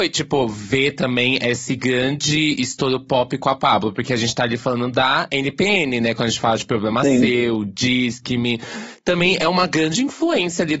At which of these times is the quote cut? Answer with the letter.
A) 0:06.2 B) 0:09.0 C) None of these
C